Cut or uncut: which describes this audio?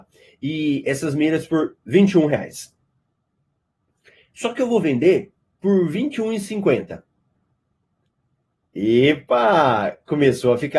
uncut